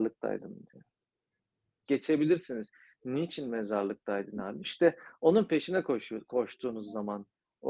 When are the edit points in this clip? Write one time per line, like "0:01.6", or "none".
0:01.9
0:04.6